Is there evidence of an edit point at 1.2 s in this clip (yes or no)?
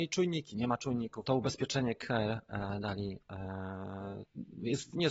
yes